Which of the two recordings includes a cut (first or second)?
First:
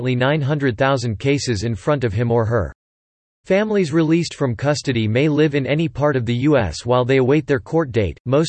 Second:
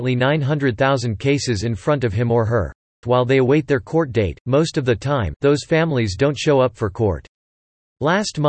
second